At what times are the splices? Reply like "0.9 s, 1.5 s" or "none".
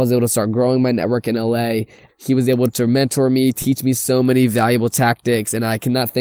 2.1 s